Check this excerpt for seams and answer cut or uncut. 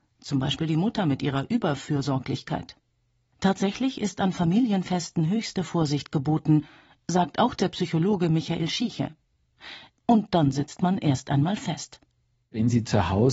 cut